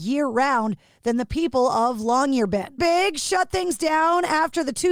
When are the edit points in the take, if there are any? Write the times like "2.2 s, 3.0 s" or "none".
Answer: 2.8 s